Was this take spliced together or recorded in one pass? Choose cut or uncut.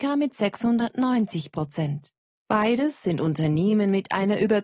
cut